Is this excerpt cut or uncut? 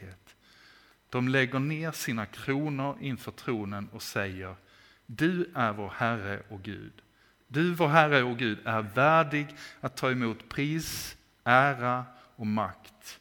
uncut